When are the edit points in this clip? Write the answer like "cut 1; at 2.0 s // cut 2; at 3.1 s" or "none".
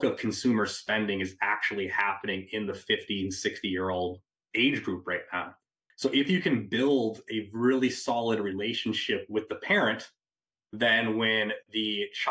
cut 1; at 5.9 s